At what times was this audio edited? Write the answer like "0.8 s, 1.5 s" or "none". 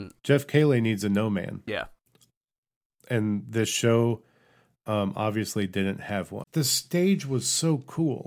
1.7 s, 6.4 s